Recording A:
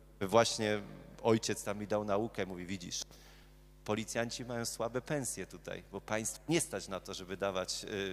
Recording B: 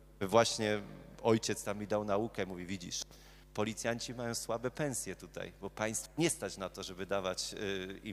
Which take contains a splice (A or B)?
B